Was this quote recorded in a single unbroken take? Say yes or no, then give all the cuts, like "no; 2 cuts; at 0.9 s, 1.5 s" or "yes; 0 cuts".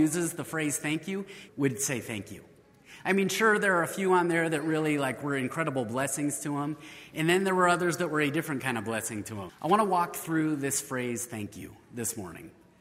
no; 2 cuts; at 1.5 s, 9.5 s